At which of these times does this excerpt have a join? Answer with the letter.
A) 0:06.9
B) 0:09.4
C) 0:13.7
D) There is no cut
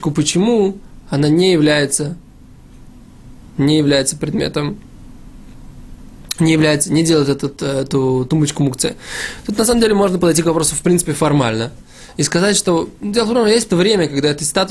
C